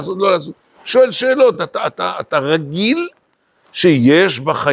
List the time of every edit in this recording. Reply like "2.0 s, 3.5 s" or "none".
none